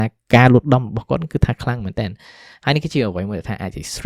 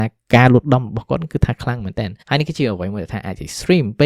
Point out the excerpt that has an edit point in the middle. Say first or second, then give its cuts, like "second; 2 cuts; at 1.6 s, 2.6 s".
second; 1 cut; at 2.2 s